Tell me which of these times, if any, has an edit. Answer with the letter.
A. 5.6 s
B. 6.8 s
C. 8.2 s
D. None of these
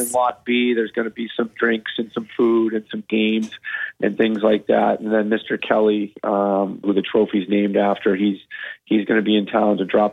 B